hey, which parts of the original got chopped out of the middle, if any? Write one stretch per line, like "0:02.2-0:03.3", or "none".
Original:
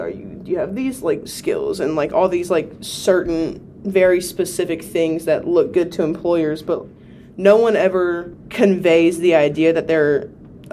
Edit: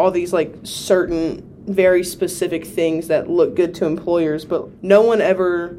0:06.9-0:07.3